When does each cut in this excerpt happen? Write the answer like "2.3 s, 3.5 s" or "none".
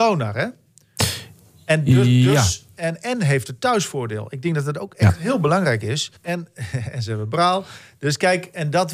6.2 s